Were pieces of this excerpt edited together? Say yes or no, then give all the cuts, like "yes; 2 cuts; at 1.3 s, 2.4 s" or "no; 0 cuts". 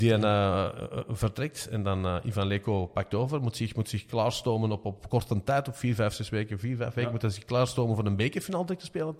no; 0 cuts